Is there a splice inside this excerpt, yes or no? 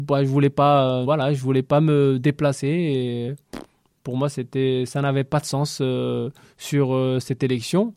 yes